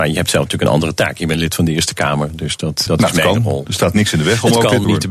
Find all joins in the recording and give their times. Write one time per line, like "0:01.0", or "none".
0:02.9